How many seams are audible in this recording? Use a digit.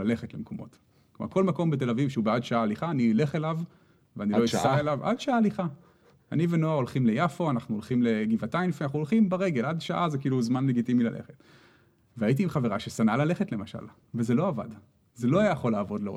0